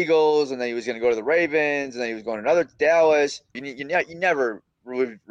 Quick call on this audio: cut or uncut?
cut